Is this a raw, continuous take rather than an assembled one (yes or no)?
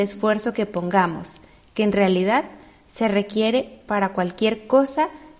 yes